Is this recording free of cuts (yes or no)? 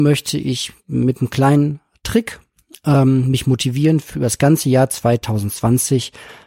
yes